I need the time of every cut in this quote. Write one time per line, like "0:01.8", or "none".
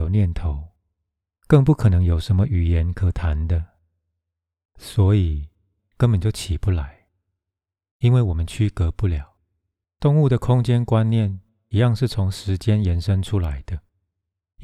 0:05.8
0:09.8